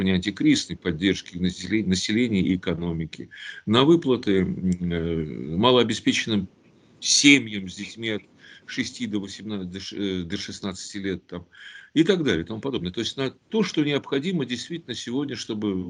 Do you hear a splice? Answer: no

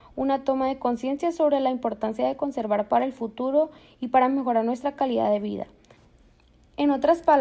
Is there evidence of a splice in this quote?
no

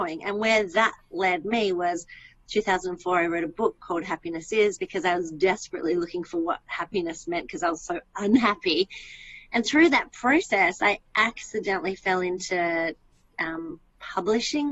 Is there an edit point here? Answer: no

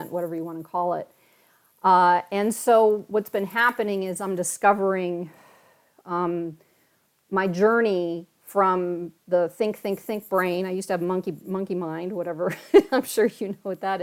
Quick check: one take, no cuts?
yes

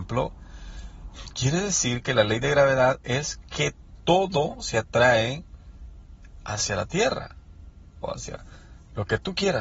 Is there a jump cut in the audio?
yes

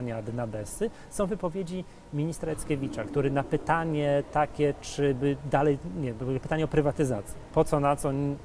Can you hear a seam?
no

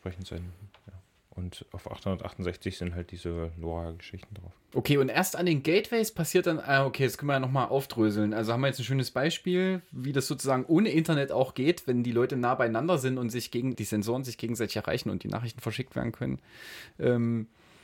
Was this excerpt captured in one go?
no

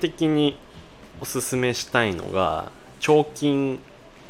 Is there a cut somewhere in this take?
no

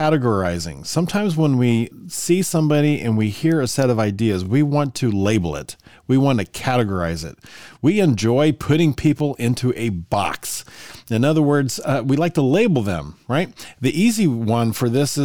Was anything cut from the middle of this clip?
no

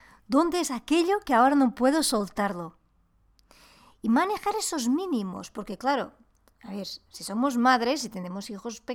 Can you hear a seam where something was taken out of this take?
no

